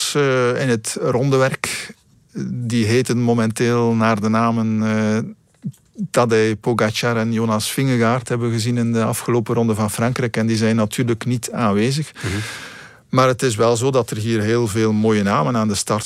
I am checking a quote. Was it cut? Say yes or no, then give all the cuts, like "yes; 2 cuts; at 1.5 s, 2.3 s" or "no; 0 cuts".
no; 0 cuts